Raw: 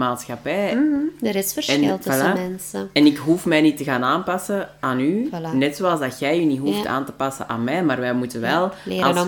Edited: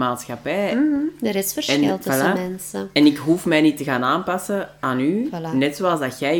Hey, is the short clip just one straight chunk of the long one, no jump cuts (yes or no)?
yes